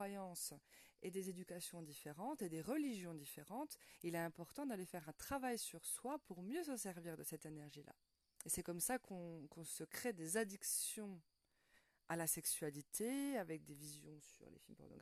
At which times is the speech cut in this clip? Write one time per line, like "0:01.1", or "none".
0:08.4